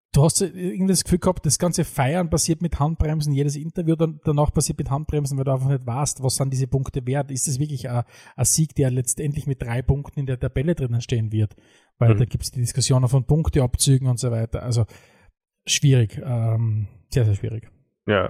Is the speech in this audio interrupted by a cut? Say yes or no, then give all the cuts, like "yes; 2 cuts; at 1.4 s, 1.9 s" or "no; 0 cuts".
no; 0 cuts